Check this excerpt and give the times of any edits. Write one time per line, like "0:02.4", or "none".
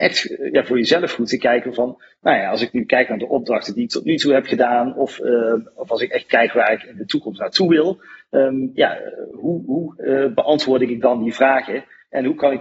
none